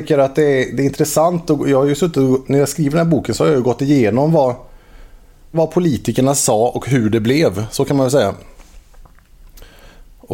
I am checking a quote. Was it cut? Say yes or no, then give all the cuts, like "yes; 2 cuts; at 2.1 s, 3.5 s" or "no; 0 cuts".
yes; 1 cut; at 5.5 s